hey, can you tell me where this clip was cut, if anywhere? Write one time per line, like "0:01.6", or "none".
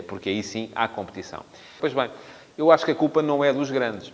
0:01.8